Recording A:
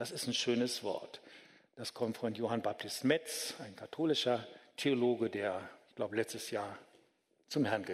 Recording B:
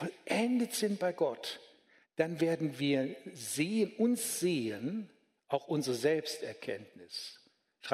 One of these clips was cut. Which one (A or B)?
B